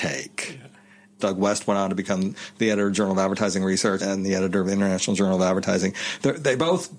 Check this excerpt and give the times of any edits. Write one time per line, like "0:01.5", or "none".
0:01.2
0:04.0